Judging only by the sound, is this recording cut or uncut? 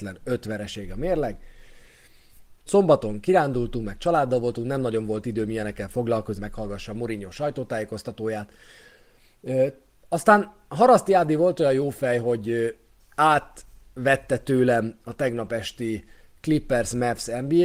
cut